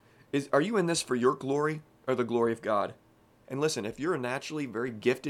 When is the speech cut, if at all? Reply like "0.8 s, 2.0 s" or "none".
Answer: 3.4 s